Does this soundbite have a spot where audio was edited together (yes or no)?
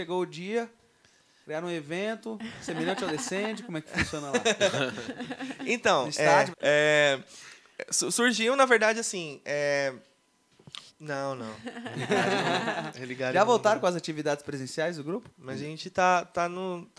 yes